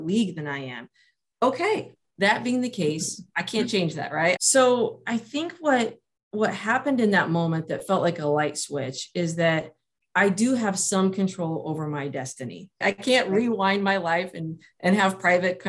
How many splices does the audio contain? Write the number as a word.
two